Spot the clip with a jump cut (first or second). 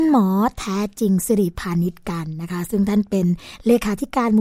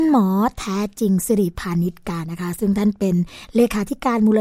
second